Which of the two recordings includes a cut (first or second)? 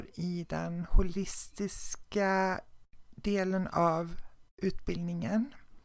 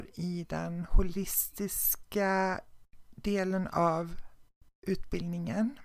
first